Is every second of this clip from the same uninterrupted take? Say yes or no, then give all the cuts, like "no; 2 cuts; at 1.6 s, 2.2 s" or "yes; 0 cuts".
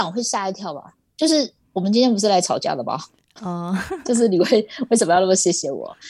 yes; 0 cuts